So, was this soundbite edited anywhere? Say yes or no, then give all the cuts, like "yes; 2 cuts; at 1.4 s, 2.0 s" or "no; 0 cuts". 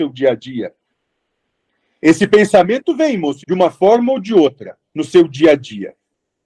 yes; 2 cuts; at 3.4 s, 4.9 s